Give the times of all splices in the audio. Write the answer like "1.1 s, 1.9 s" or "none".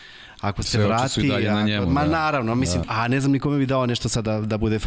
2.8 s

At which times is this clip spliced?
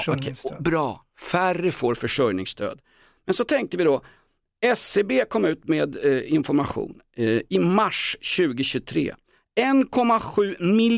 none

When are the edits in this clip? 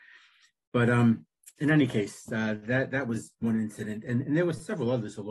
none

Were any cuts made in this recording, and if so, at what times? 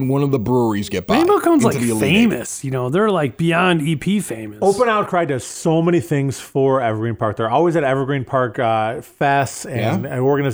none

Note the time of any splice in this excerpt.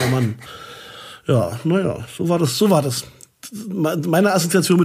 none

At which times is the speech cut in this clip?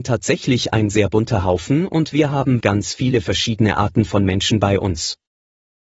2.6 s

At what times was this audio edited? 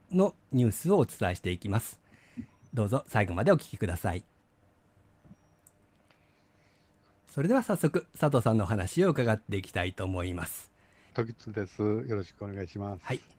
11.1 s

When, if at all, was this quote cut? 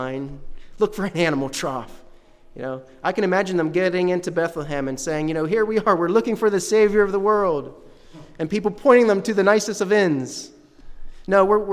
none

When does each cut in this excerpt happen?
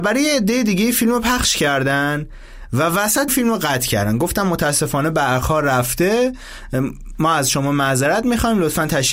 3.3 s

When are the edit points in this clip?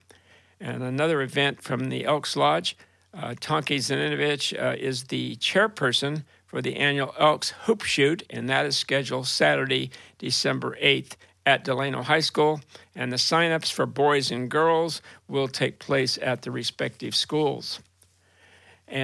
none

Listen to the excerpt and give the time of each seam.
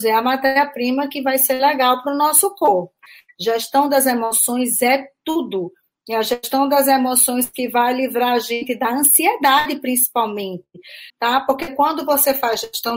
11.1 s

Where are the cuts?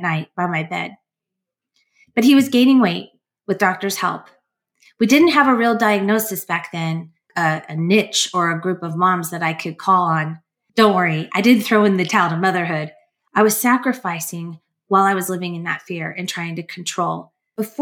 7.3 s, 10.7 s, 13.3 s

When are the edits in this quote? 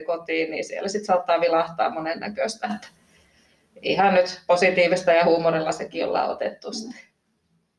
none

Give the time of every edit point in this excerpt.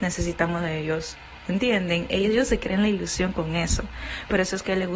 none

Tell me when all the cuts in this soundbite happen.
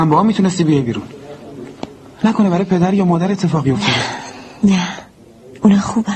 none

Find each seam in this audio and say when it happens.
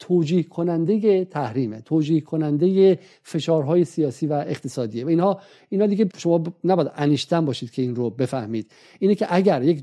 6.1 s

